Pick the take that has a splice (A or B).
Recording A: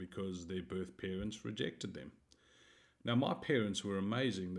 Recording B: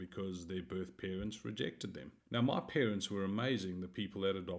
B